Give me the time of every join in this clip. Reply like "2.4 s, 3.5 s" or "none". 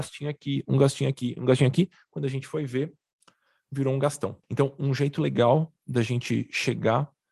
1.4 s, 4.4 s